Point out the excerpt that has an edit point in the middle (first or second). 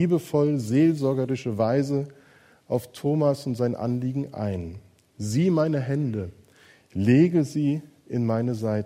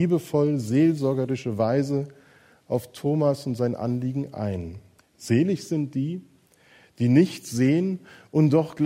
second